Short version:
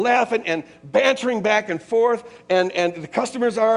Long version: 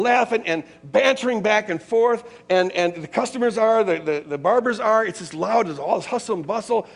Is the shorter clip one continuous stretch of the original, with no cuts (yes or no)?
yes